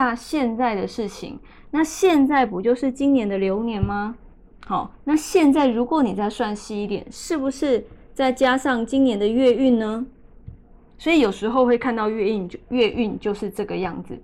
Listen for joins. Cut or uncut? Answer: uncut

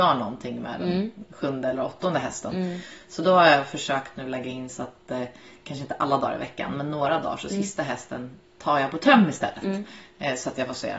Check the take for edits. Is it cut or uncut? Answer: uncut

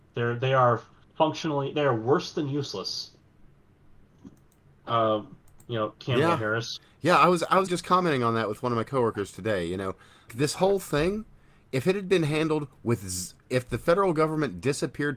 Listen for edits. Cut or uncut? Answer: cut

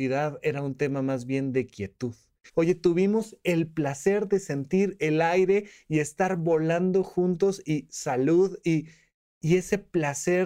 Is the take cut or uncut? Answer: cut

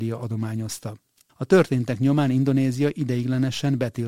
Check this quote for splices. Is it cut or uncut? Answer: cut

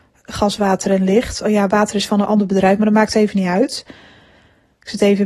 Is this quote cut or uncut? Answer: uncut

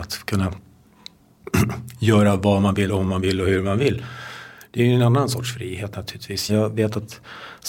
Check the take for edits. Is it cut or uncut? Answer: cut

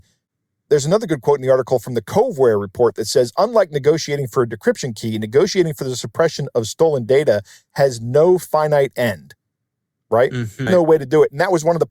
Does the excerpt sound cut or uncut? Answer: cut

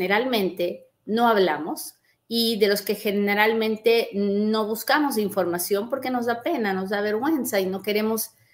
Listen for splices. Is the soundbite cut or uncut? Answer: uncut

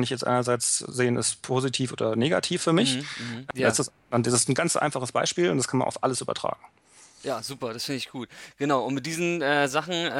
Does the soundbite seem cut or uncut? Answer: cut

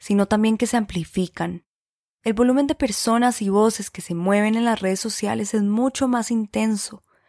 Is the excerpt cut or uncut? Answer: uncut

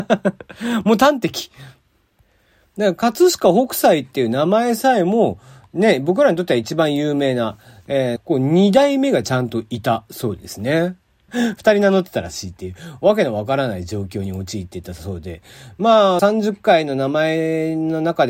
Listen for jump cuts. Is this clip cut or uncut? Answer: cut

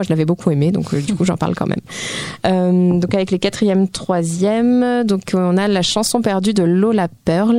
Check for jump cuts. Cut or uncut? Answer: uncut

